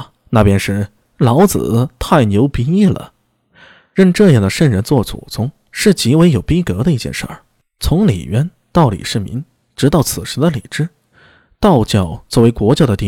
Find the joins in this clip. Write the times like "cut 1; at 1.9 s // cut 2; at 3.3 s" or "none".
none